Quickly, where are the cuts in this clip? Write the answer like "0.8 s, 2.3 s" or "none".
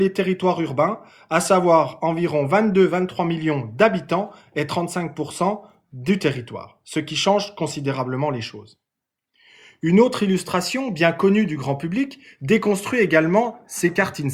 none